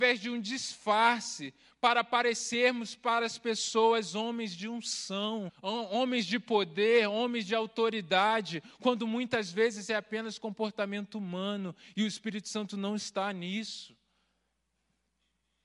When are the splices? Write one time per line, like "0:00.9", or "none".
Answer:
0:05.5